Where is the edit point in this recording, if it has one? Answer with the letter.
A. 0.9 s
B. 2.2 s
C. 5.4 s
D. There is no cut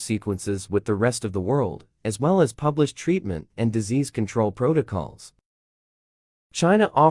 D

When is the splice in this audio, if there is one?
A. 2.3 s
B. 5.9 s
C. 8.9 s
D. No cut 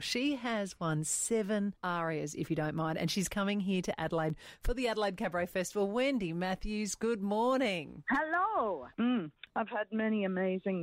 C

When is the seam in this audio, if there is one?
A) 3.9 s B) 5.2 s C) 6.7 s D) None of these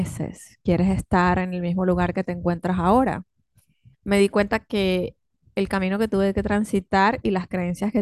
A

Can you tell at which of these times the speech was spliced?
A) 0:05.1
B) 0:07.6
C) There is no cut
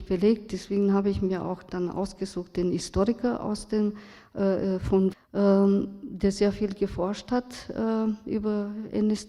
A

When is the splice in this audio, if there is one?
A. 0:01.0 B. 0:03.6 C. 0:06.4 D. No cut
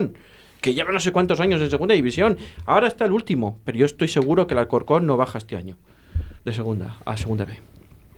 C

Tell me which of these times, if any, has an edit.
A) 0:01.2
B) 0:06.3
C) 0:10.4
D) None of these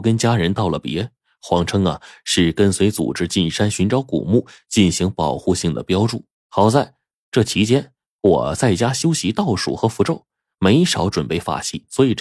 B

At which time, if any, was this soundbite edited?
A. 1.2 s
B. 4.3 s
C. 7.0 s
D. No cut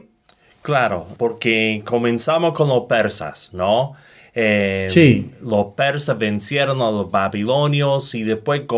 A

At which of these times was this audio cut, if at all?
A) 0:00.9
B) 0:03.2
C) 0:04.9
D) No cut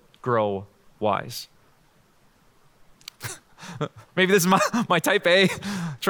B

